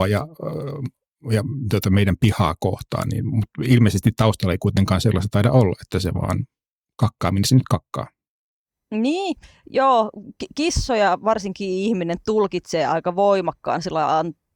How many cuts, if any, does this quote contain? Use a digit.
0